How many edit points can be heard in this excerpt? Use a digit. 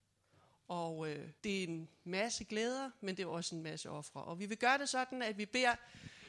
1